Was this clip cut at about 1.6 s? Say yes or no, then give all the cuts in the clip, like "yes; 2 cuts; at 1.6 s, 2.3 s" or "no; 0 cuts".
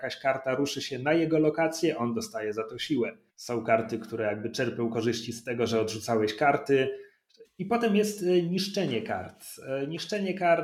no; 2 cuts; at 3.3 s, 7.4 s